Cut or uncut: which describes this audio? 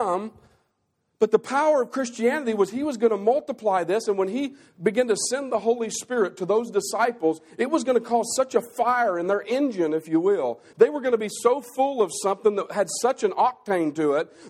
uncut